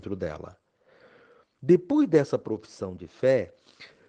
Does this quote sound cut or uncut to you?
uncut